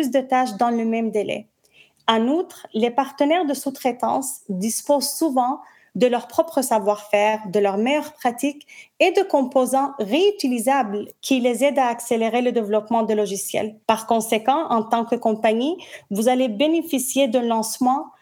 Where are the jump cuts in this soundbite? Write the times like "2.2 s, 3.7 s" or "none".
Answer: 13.8 s